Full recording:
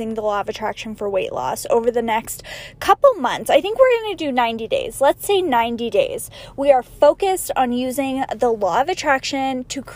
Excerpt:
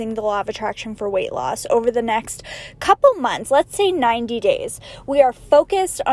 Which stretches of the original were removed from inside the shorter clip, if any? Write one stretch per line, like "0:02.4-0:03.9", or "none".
0:03.4-0:04.9